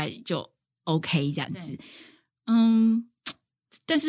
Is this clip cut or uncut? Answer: uncut